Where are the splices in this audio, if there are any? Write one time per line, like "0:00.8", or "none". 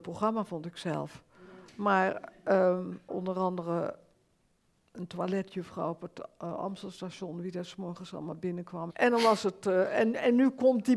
0:03.1
0:08.9